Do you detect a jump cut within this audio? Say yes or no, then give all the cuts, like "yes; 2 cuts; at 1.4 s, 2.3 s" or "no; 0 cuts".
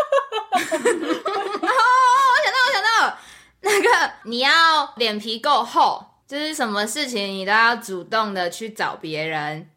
no; 0 cuts